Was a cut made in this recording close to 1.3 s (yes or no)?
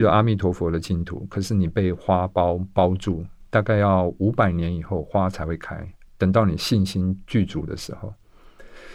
no